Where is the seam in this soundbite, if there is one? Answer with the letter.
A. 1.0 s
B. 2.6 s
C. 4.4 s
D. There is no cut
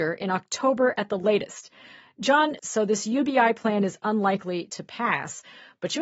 B